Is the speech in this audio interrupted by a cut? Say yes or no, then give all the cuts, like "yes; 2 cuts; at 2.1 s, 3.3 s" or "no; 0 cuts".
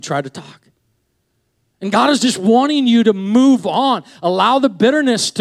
no; 0 cuts